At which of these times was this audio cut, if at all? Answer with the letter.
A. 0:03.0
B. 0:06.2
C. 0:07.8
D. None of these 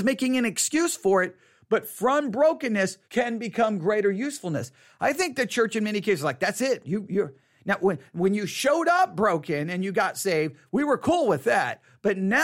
A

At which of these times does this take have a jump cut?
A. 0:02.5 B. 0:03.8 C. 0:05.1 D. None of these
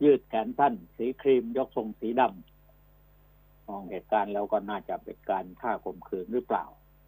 D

